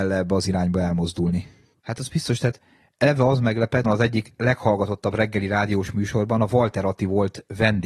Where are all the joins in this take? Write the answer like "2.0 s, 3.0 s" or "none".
1.7 s, 3.8 s